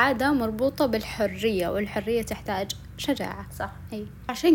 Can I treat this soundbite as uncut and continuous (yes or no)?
yes